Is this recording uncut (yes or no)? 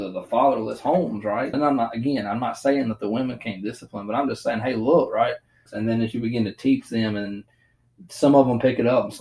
no